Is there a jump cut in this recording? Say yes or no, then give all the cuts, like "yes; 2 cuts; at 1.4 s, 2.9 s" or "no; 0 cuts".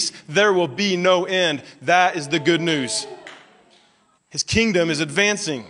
yes; 1 cut; at 4.2 s